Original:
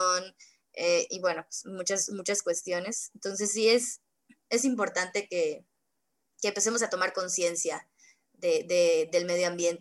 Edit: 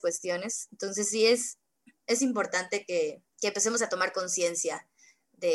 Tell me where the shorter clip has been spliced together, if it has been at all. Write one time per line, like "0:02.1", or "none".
0:03.3